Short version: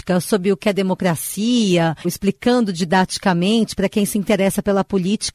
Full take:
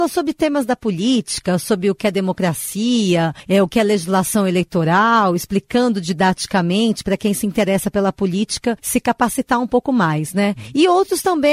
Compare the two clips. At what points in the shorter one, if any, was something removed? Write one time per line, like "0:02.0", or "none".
0:02.0